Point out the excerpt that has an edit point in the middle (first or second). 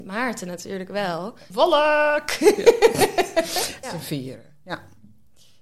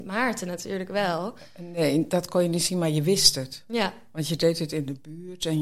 first